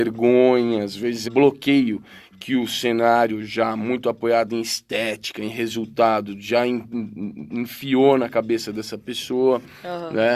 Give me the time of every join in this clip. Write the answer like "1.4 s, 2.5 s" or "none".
1.3 s